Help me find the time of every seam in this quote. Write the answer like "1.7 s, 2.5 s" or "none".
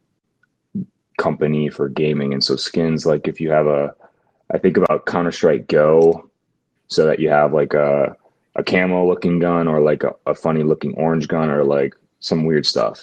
6.8 s